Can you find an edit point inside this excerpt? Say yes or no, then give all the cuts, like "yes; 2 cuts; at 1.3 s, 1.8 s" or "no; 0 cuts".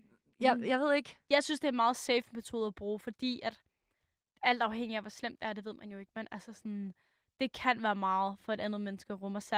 no; 0 cuts